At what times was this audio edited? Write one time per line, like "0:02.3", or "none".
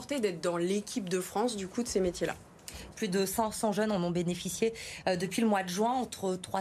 0:02.9